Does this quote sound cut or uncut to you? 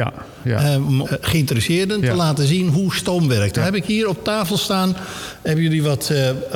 cut